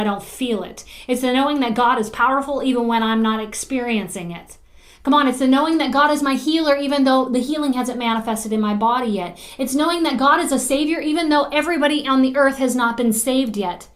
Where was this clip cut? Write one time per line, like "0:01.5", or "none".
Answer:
none